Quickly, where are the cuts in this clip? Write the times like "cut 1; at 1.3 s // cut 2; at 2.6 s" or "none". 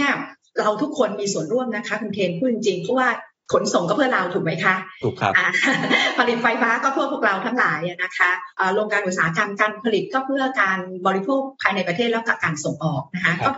none